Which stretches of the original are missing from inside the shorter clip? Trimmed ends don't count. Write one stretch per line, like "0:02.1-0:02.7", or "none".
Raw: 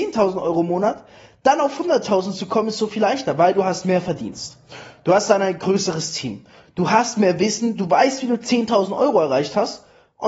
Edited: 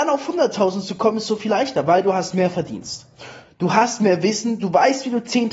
0:04.9-0:06.6